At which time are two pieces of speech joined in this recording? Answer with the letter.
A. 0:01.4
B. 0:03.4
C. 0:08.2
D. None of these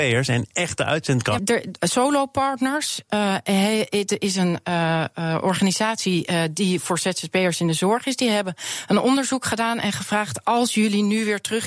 A